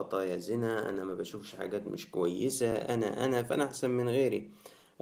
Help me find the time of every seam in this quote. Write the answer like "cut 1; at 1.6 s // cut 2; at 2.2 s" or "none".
none